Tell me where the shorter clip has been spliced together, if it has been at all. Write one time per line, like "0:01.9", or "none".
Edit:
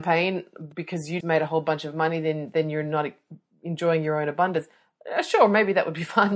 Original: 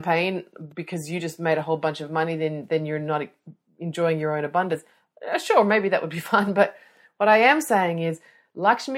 0:01.2

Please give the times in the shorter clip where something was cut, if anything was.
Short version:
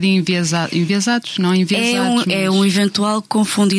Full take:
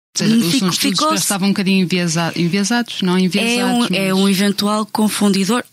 none

